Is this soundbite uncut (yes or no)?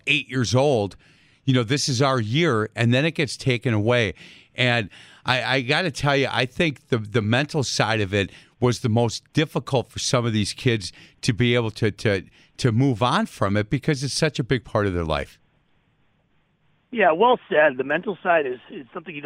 yes